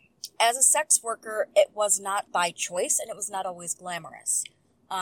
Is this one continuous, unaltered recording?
no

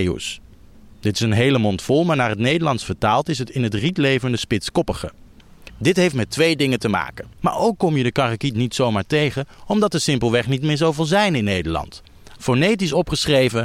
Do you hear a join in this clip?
yes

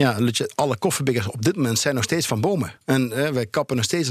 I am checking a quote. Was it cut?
yes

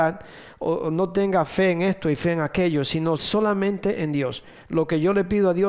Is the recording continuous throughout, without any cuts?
no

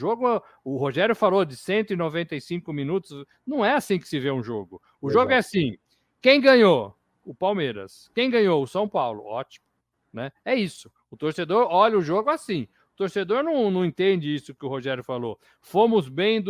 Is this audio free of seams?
yes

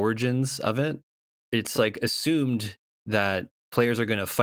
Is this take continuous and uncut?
yes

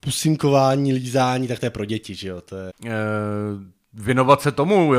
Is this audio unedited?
no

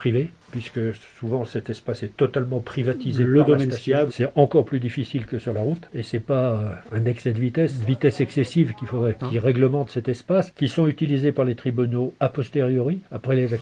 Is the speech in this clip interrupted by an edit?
yes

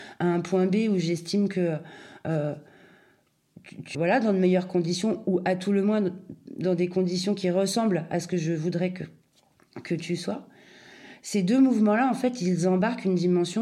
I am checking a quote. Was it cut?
yes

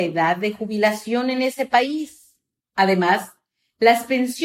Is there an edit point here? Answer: yes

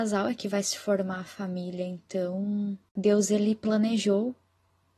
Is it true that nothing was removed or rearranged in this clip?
yes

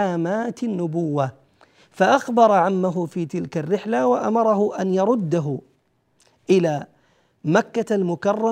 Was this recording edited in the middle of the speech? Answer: no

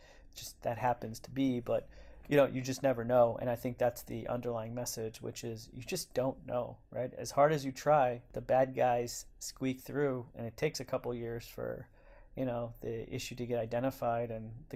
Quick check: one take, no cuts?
yes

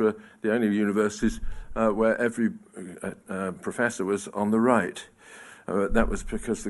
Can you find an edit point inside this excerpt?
no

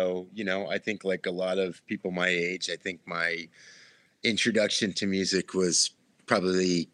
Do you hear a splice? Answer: no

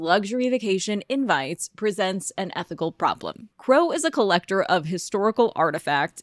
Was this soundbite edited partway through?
yes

